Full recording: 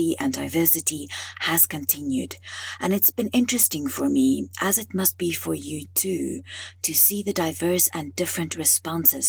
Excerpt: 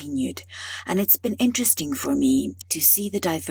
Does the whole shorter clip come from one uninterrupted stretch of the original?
no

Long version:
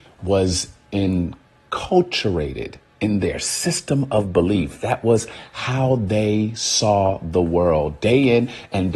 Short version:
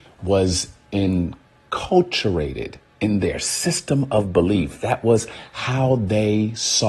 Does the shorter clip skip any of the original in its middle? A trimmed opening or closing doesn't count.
no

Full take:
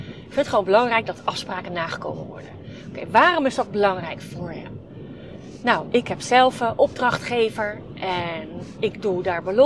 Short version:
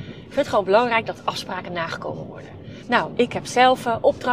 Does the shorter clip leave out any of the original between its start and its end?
yes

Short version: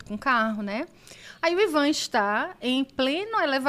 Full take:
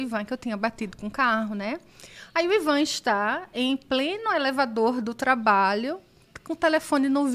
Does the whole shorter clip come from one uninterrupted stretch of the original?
yes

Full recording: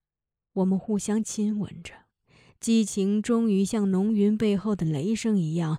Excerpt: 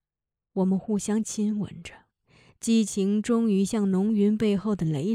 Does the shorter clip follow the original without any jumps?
yes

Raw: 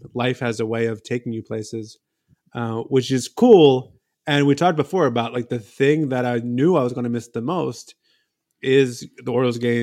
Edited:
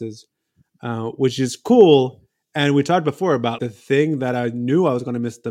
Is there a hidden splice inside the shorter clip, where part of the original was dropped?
yes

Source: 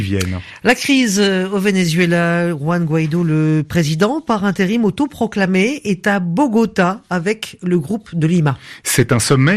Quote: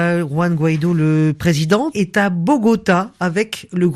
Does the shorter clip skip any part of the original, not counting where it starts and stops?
yes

